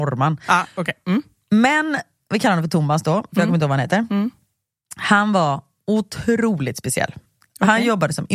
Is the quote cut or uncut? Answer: uncut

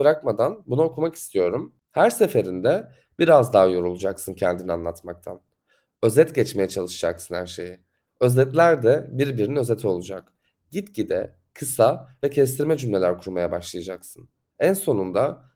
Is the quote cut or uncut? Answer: uncut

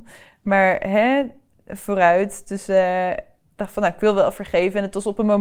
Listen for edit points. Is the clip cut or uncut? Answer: uncut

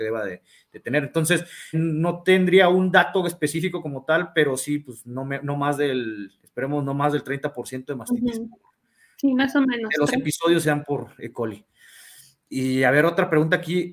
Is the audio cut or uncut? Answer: cut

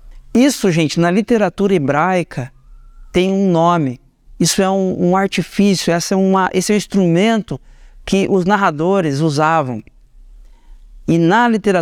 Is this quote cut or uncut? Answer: uncut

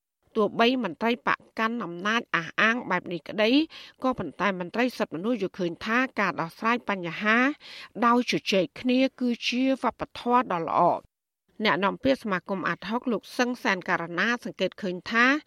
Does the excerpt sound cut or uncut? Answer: uncut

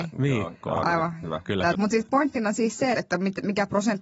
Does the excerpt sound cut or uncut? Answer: cut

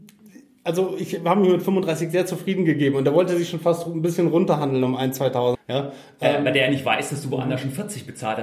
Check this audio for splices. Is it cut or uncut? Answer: cut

